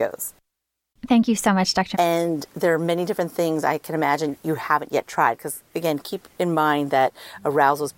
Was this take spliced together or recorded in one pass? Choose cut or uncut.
cut